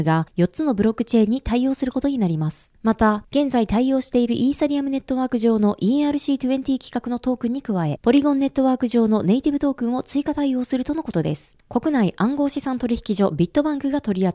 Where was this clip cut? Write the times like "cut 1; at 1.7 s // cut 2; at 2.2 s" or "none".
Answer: cut 1; at 3.3 s // cut 2; at 11.6 s